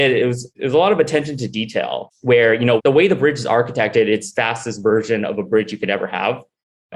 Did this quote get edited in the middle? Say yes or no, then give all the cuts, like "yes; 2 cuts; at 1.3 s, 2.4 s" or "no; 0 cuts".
yes; 2 cuts; at 2.8 s, 4.3 s